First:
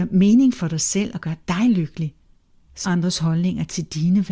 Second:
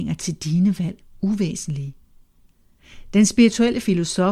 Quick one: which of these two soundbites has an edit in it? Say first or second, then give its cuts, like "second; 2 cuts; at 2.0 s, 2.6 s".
first; 1 cut; at 2.8 s